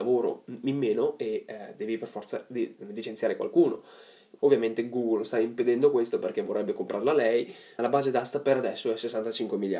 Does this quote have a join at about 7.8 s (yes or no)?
yes